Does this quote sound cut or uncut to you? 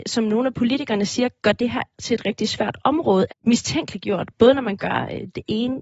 cut